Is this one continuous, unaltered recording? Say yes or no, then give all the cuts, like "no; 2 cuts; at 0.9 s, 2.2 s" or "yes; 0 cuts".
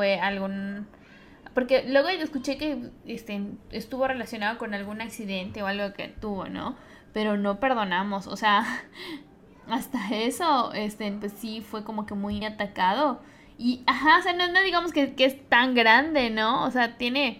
no; 1 cut; at 12.4 s